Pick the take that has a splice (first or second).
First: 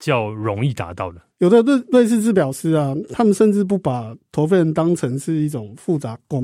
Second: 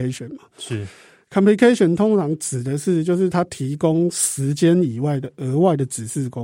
first